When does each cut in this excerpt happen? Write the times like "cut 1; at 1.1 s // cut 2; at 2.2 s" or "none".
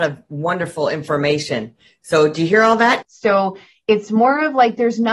cut 1; at 3.0 s